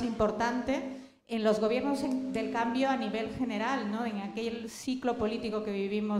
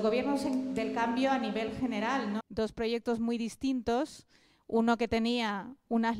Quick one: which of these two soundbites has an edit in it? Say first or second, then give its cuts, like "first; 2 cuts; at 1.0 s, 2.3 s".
second; 1 cut; at 2.4 s